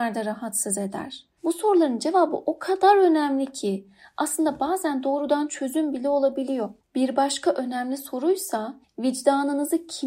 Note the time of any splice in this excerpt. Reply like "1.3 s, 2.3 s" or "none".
1.4 s